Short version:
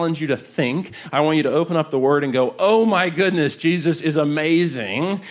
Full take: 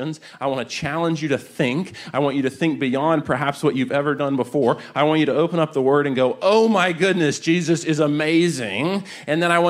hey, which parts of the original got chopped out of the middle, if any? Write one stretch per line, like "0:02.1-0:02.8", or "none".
0:02.1-0:04.9